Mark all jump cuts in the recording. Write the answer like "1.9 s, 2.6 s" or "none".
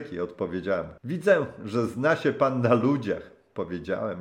1.0 s

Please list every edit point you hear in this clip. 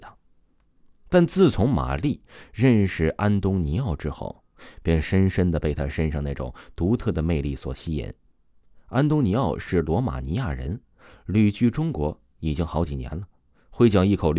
none

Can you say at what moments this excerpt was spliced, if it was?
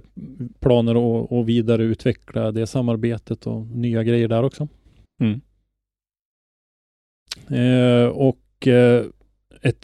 5.1 s, 7.4 s

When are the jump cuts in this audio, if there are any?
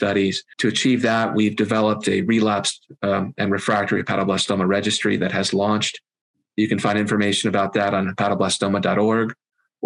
none

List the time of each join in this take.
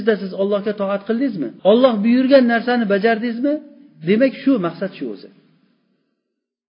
1.6 s

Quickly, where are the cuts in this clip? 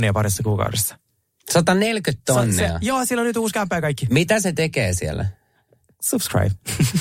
none

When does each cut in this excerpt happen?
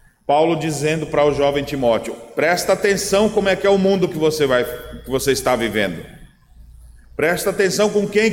none

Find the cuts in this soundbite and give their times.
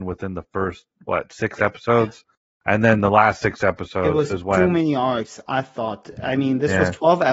none

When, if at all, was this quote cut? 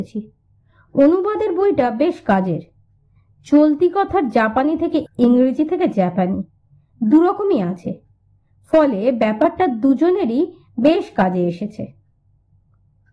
5.1 s

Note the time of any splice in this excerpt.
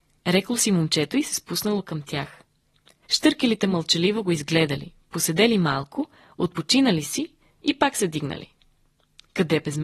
3.0 s

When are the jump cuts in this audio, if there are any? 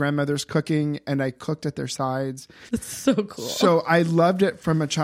2.7 s

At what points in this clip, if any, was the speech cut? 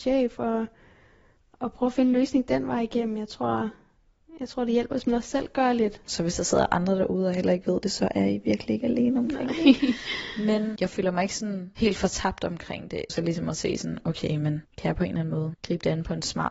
6.1 s, 13.1 s

